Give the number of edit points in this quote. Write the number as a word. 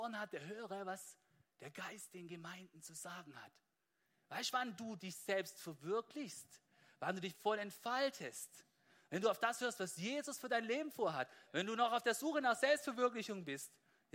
one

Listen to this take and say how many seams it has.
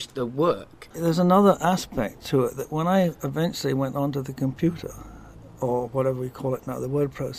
one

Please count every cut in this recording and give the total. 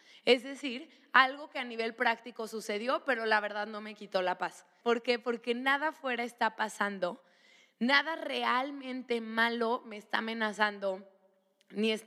one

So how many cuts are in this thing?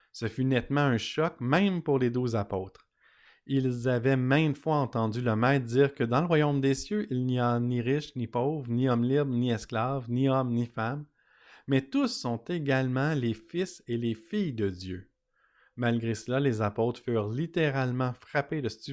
zero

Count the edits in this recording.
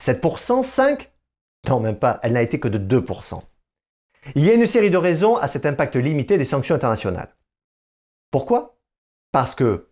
one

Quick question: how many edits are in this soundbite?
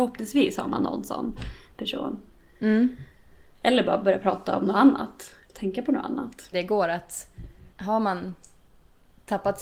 two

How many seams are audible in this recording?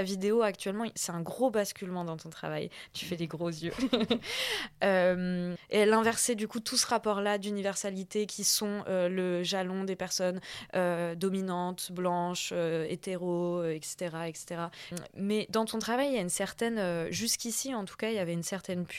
two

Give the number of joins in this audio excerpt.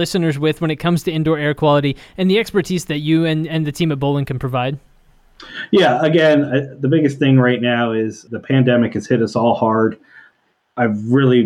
zero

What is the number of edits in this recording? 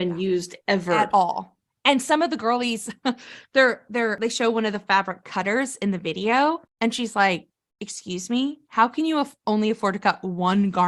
zero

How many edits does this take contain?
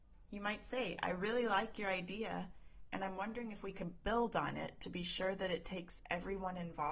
zero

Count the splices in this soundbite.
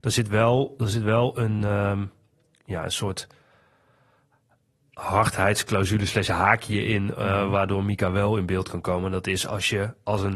zero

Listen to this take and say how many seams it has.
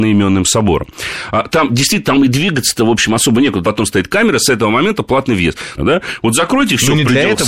two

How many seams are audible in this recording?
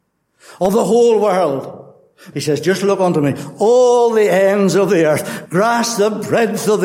two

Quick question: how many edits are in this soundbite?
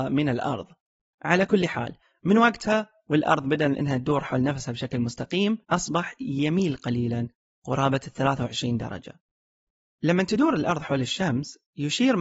one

